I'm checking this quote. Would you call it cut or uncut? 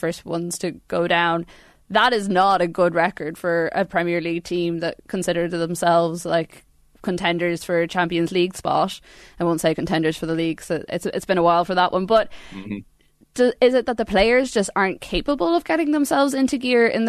uncut